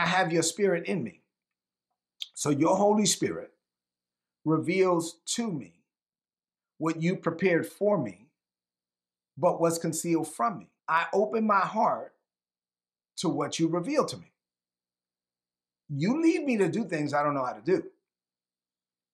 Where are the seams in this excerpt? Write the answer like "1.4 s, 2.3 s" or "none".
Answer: 10.8 s